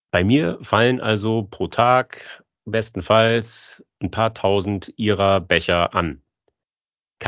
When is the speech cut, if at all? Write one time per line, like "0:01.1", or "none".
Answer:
none